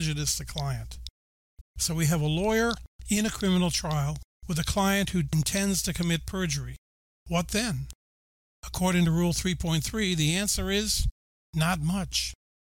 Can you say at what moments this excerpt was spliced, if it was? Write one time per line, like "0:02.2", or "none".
0:01.6